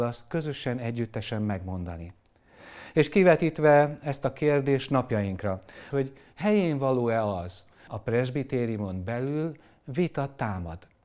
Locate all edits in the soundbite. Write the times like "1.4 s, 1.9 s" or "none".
5.9 s, 7.9 s